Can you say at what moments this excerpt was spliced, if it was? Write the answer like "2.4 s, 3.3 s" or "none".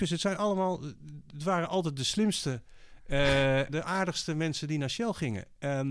3.7 s